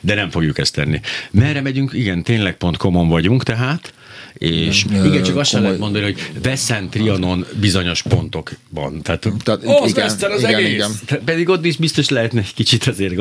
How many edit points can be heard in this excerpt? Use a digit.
1